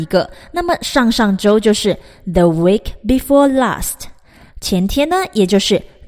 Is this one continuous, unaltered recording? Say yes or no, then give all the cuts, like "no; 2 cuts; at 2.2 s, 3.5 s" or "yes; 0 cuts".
yes; 0 cuts